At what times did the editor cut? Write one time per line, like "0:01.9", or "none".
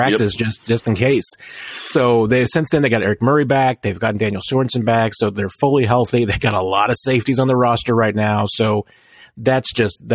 none